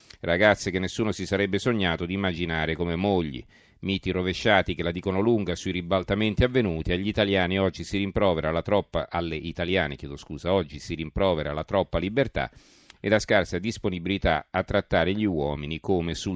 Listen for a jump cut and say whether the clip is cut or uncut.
uncut